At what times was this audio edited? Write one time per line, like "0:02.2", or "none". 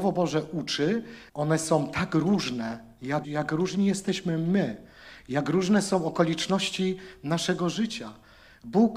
0:01.3
0:03.2